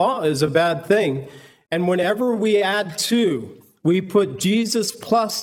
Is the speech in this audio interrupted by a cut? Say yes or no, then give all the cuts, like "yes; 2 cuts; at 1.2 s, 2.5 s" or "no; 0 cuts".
yes; 1 cut; at 1.7 s